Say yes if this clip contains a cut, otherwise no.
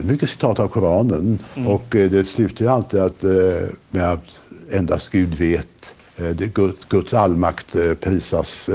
no